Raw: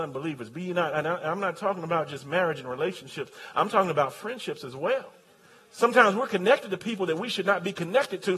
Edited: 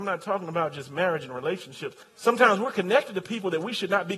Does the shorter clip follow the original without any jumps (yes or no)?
no